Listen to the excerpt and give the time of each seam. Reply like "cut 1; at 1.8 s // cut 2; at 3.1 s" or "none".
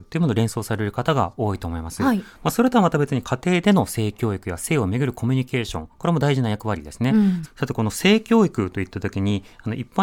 cut 1; at 7.4 s

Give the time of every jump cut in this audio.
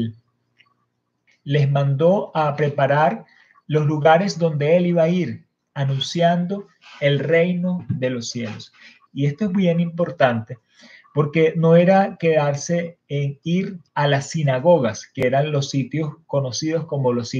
cut 1; at 1.3 s // cut 2; at 9.1 s // cut 3; at 13.9 s

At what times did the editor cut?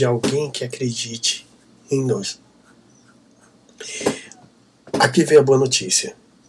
none

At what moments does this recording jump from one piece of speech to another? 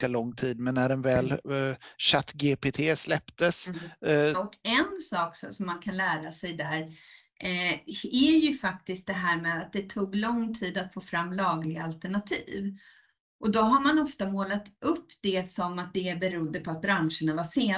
cut 1; at 4.3 s

